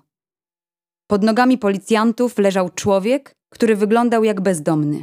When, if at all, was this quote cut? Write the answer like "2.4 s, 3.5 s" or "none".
3.4 s